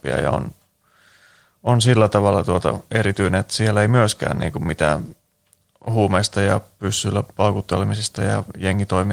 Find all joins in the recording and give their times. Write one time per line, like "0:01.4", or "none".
none